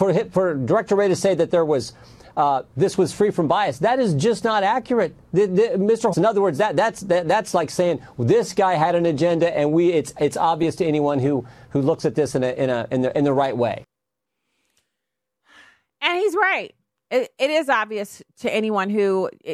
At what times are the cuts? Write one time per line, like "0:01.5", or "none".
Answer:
0:06.1